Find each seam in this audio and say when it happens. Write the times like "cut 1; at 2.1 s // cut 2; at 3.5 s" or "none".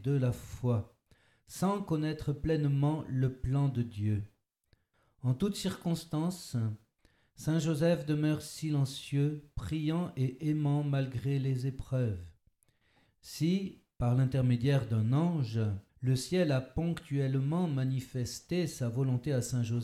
cut 1; at 13.1 s // cut 2; at 15.9 s